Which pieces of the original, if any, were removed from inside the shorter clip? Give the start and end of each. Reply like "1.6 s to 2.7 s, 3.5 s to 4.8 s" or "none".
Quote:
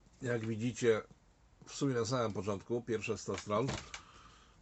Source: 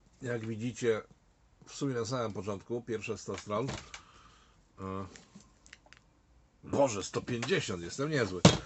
none